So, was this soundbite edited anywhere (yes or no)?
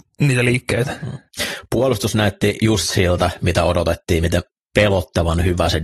no